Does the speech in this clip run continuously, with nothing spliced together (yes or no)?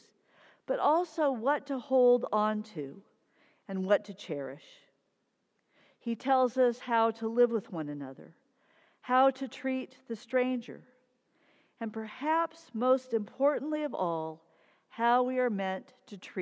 yes